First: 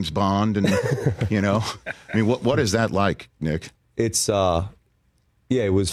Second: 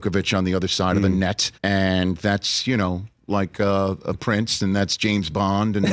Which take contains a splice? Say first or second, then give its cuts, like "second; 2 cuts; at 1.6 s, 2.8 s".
second; 2 cuts; at 1.6 s, 4.6 s